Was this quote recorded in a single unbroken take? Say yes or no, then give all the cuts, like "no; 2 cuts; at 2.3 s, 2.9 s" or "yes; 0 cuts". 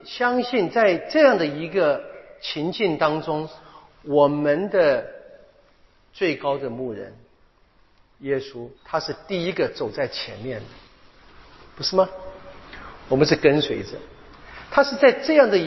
no; 1 cut; at 8.8 s